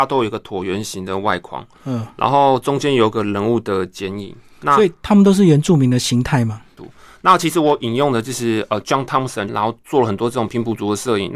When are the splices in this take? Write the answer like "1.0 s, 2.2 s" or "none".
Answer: 6.8 s, 9.5 s